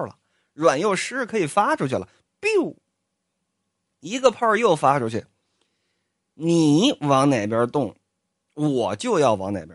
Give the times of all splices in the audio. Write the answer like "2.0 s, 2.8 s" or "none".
none